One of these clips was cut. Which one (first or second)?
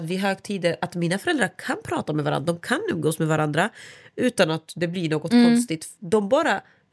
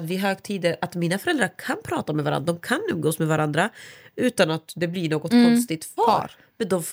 second